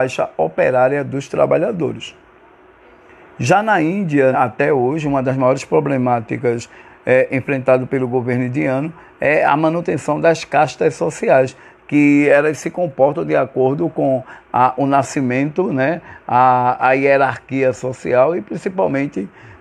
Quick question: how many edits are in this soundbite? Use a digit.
1